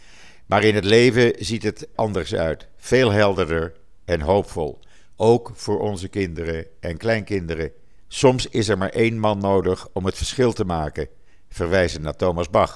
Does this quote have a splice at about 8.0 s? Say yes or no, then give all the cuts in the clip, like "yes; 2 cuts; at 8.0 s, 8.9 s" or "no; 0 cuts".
yes; 2 cuts; at 1.9 s, 8.0 s